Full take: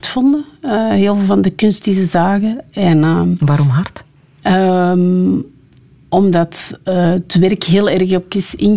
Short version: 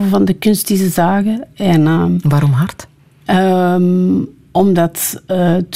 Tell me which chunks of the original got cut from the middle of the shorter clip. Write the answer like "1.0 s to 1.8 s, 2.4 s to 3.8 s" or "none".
5.6 s to 6.0 s

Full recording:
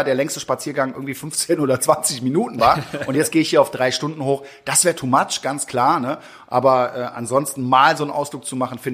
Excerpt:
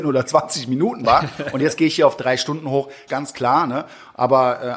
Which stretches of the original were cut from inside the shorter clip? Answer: 4.6 s to 5.4 s

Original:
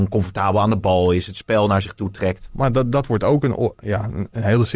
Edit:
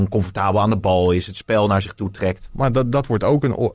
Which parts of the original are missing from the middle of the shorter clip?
none

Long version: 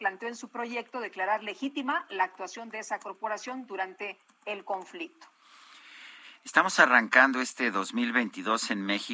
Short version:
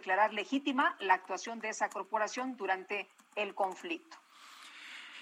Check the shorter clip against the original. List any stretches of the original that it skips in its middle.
none

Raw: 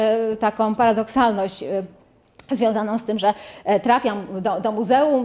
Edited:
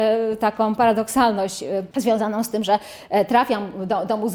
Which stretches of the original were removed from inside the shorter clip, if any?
1.9 s to 2.5 s

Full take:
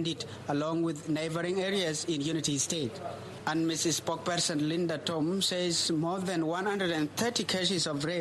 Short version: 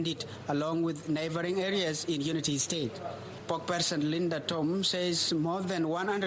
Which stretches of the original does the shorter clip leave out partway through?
3.4 s to 4.0 s

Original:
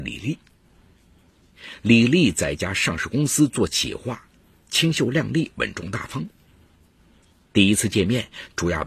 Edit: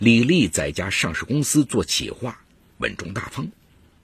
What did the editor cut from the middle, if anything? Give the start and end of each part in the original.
4.6 s to 5.5 s

